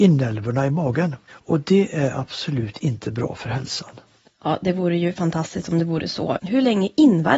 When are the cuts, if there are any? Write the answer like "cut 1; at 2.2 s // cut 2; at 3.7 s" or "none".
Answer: cut 1; at 4.3 s // cut 2; at 6.4 s